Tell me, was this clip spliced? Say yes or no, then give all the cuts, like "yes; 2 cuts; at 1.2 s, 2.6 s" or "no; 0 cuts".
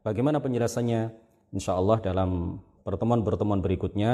yes; 1 cut; at 2.8 s